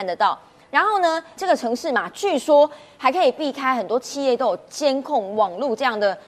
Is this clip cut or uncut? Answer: cut